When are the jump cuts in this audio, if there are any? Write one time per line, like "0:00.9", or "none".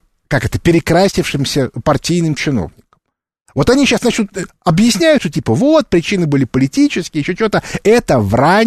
0:03.5